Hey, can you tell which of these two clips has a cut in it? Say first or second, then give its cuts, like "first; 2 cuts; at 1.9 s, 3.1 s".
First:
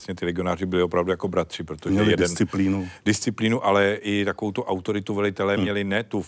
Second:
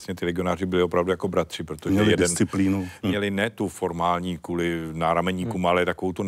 second; 1 cut; at 3.0 s